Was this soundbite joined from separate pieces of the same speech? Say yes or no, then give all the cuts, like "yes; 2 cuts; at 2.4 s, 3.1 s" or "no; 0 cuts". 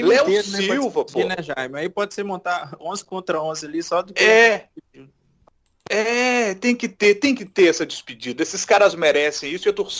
no; 0 cuts